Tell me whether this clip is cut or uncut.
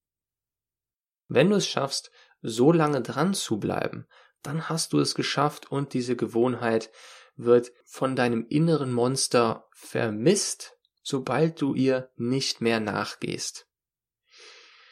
uncut